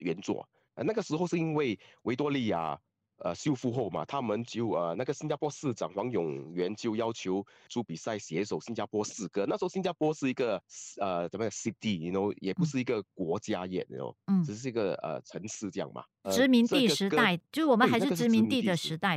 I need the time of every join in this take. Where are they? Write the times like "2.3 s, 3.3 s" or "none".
none